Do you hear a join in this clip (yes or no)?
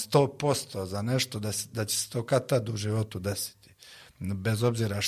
no